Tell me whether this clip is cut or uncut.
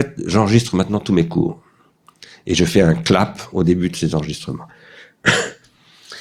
uncut